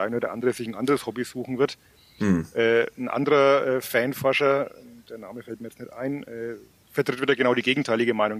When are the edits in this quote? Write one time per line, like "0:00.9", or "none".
none